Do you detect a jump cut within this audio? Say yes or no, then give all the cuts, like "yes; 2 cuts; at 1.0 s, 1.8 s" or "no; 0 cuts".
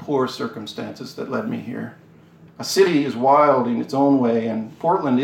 yes; 1 cut; at 2.5 s